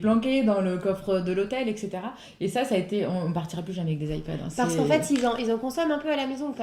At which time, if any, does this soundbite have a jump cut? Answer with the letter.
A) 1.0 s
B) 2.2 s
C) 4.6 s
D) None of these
D